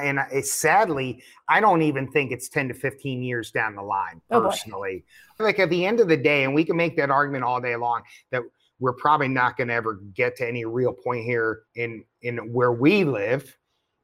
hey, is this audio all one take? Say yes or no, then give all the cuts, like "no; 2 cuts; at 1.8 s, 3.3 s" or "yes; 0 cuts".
no; 2 cuts; at 5.4 s, 11.7 s